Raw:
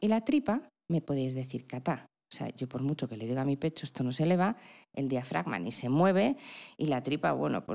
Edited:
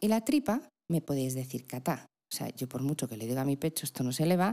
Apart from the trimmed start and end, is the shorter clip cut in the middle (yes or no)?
no